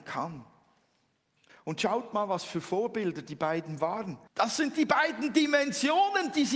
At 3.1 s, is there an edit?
no; 2 cuts; at 1.5 s, 4.3 s

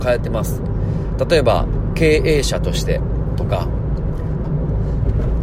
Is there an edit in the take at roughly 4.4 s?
yes; 1 cut; at 4.4 s

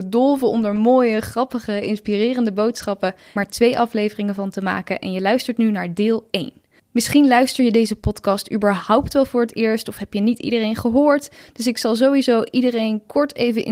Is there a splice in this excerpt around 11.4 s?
no; 1 cut; at 3.4 s

